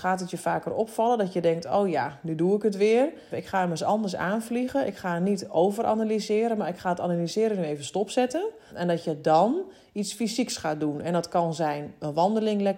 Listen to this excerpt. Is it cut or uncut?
cut